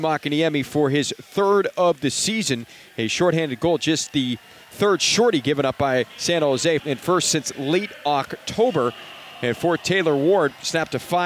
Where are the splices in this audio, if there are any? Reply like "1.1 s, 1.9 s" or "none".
6.8 s